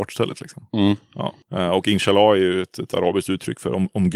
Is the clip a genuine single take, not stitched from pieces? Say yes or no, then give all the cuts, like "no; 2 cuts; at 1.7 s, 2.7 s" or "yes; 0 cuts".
yes; 0 cuts